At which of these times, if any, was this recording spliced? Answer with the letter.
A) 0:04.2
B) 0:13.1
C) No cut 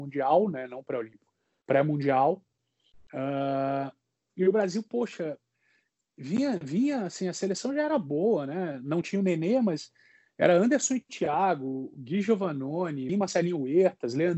B